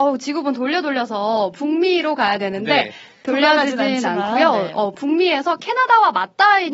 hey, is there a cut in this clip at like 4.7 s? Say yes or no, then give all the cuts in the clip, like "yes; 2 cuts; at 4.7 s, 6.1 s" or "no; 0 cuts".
no; 1 cut; at 3.2 s